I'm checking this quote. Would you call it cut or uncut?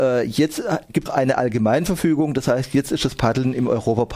cut